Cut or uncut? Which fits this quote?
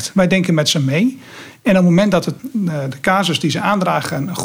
cut